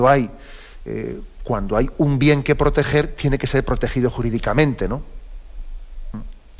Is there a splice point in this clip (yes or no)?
no